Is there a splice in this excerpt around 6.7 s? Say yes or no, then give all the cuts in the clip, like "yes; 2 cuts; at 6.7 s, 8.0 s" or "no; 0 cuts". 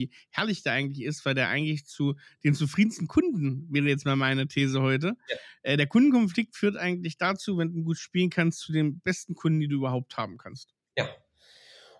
no; 0 cuts